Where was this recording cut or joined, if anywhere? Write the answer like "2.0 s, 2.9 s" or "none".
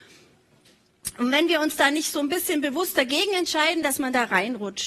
3.8 s